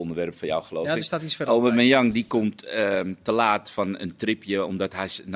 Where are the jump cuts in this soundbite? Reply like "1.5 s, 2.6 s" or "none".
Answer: none